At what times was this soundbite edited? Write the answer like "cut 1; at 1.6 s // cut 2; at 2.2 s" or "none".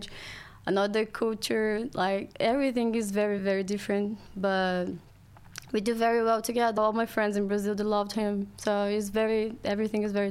cut 1; at 3.4 s // cut 2; at 6.8 s